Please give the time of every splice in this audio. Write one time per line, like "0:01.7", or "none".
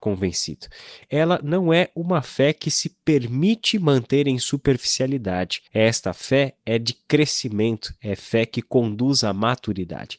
0:01.0
0:05.7